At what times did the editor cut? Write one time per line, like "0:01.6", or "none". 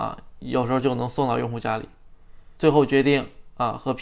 0:02.6